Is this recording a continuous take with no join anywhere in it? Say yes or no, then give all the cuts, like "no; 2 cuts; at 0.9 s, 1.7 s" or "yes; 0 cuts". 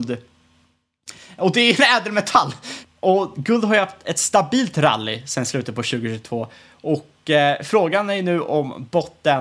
yes; 0 cuts